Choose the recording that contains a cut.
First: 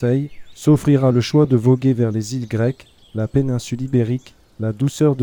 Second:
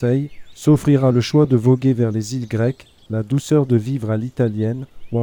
second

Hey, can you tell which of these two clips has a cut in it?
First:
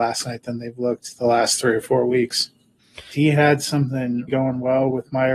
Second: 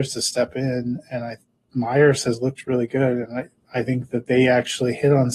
first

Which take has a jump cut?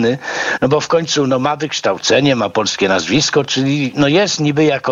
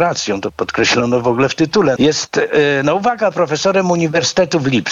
second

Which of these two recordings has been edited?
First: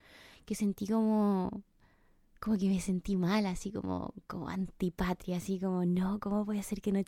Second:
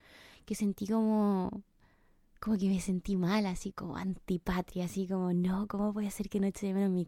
second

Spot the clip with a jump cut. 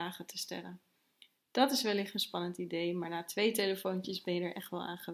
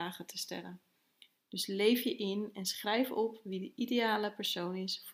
second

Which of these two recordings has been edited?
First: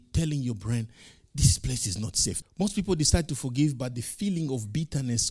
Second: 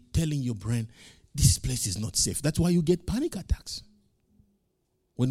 first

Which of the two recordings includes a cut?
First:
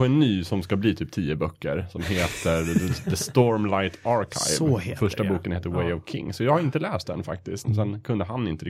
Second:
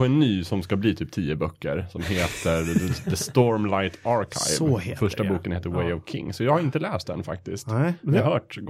first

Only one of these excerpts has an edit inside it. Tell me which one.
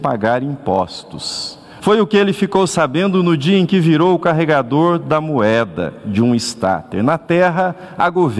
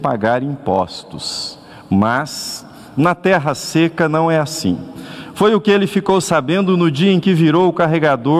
first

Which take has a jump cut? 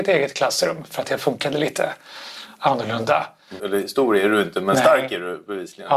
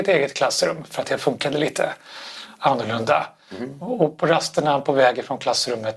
first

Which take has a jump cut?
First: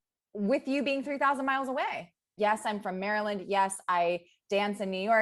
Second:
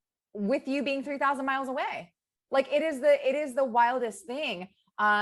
first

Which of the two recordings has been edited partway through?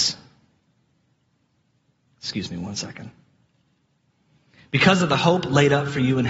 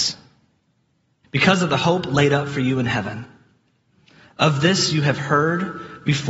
second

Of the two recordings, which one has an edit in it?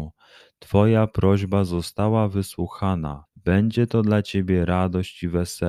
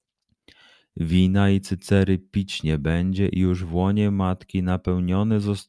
first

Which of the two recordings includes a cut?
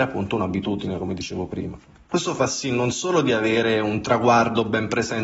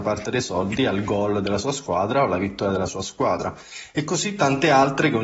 first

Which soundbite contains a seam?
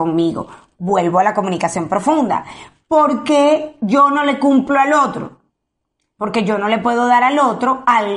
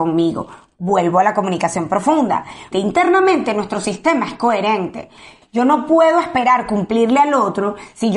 second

